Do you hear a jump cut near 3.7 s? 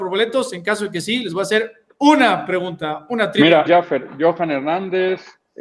yes; 1 cut; at 3.7 s

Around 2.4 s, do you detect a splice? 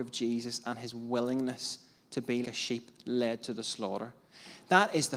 yes; 1 cut; at 2.4 s

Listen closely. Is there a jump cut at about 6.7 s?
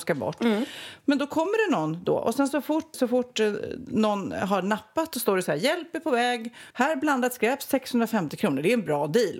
yes; 2 cuts; at 2.9 s, 6.7 s

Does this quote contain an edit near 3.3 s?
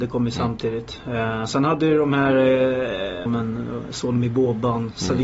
yes; 1 cut; at 3.3 s

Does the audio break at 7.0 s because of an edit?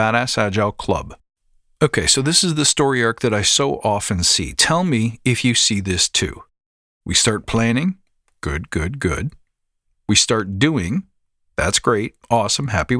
yes; 1 cut; at 7.0 s

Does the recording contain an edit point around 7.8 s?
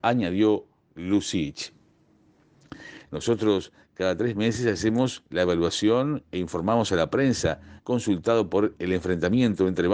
yes; 2 cuts; at 3.1 s, 7.8 s

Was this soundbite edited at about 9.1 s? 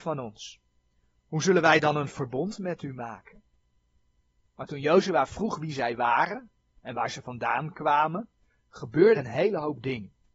yes; 1 cut; at 9.1 s

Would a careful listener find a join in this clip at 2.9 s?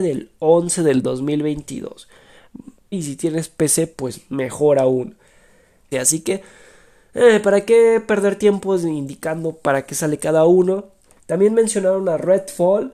yes; 3 cuts; at 2.9 s, 5.9 s, 11.2 s

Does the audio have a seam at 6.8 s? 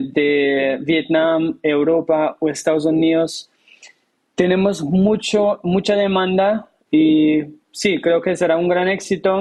yes; 1 cut; at 6.8 s

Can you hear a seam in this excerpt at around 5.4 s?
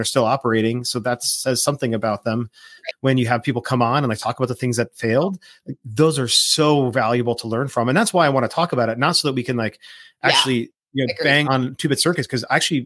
no; 2 cuts; at 2.9 s, 11.4 s

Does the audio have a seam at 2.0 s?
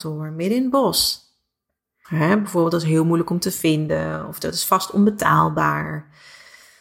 yes; 1 cut; at 2.0 s

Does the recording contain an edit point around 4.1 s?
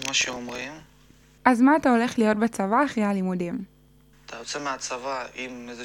yes; 2 cuts; at 1.4 s, 4.1 s

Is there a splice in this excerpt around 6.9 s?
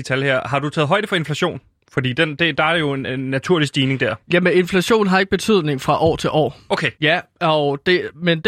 yes; 1 cut; at 6.9 s

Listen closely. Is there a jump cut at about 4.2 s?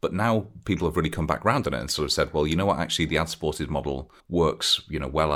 yes; 1 cut; at 4.2 s

